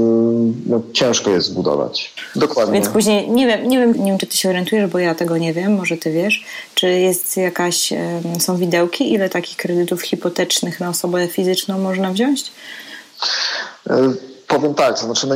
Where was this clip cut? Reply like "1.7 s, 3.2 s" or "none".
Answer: 2.3 s, 3.9 s